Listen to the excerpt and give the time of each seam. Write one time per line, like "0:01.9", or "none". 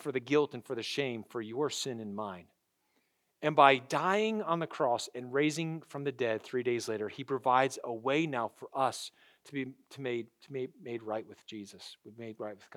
none